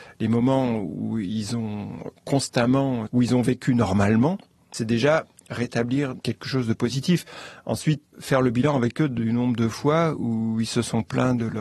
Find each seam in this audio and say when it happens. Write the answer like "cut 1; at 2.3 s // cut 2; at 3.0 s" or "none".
cut 1; at 3.1 s // cut 2; at 8.1 s

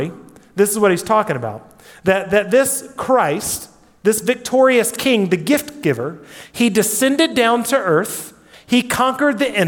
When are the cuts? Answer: cut 1; at 8.5 s

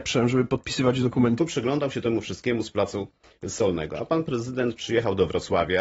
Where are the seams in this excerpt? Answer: cut 1; at 1.4 s

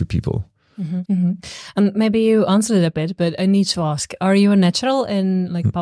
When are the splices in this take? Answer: cut 1; at 1.0 s

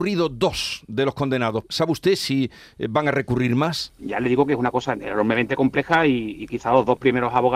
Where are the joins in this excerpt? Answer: cut 1; at 1.7 s // cut 2; at 4.0 s

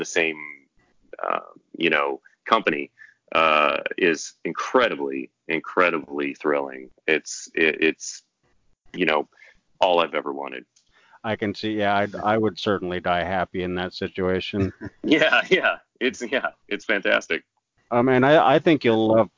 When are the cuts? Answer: none

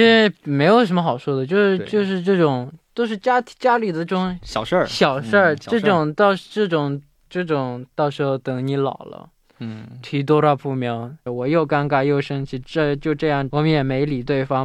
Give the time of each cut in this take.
cut 1; at 11.3 s // cut 2; at 13.5 s

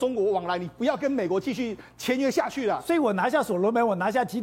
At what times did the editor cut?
none

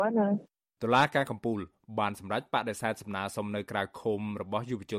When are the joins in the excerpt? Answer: none

